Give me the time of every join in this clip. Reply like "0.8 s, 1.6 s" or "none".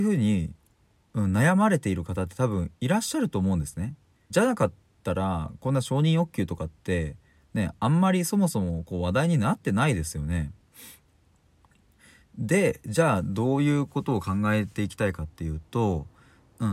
4.3 s